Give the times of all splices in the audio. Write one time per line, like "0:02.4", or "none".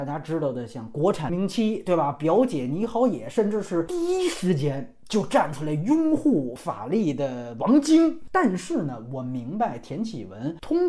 0:01.3
0:08.3

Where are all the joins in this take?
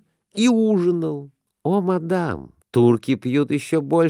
0:01.5
0:02.6

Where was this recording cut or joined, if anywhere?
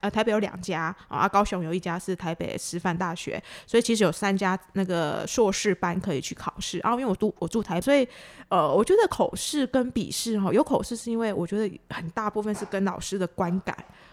0:07.8

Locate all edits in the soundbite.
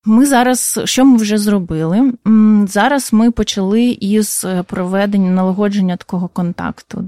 none

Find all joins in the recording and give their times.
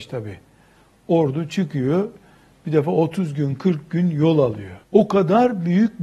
0:04.8

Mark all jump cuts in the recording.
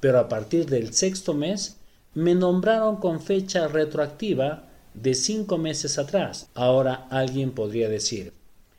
0:06.5

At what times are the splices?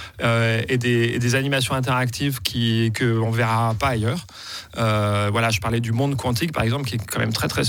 none

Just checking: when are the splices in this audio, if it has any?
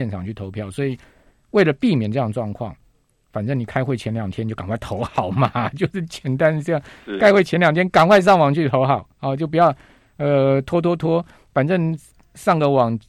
none

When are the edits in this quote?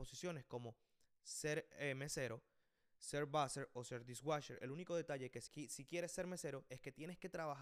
0:05.5

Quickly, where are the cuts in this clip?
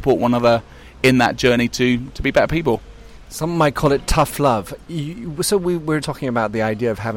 0:04.8
0:06.0

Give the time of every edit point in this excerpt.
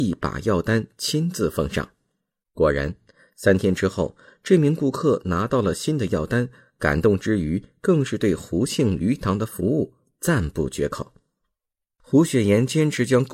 none

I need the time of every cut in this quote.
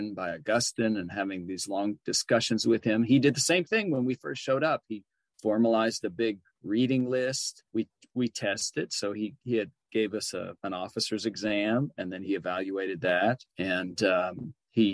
0:07.7
0:10.6
0:13.5

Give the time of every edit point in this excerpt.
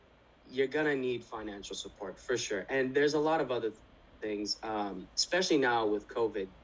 none

